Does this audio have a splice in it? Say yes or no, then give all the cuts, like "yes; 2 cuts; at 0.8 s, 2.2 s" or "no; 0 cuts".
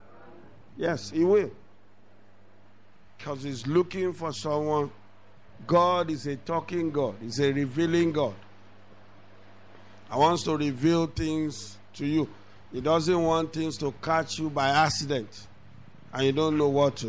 no; 0 cuts